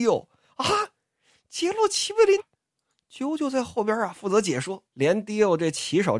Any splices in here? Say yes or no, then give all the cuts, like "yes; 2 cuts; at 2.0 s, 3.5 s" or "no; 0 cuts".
yes; 2 cuts; at 2.4 s, 4.9 s